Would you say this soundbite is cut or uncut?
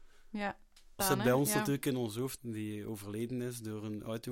cut